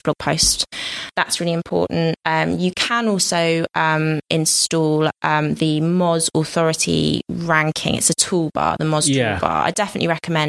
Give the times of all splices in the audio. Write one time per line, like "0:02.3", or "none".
0:02.2